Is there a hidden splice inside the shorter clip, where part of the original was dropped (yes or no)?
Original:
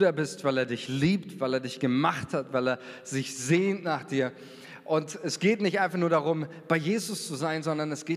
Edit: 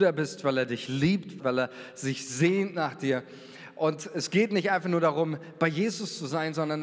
yes